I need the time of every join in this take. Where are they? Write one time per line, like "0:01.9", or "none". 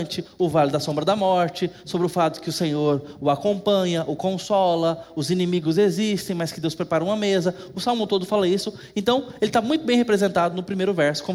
none